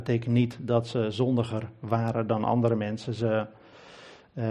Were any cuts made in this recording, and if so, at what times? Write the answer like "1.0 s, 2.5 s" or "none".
none